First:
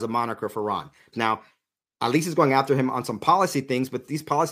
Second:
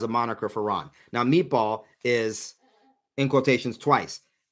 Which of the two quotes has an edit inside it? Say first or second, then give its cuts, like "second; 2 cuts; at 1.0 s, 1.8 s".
first; 1 cut; at 1.1 s